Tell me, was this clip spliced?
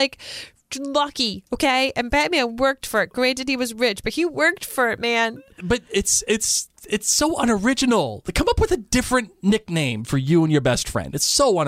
no; 0 cuts

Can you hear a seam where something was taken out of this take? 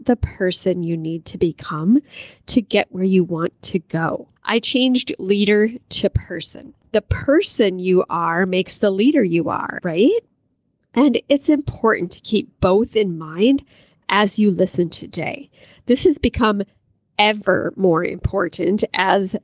yes; 2 cuts; at 4.4 s, 9.8 s

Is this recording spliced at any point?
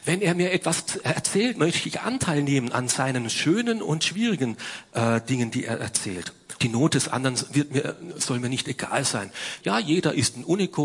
yes; 2 cuts; at 6.6 s, 9.6 s

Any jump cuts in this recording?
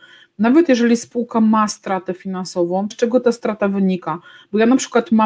yes; 1 cut; at 2.9 s

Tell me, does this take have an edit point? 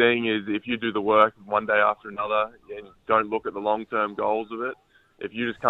no; 0 cuts

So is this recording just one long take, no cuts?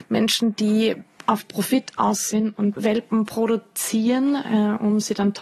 no; 1 cut; at 2.8 s

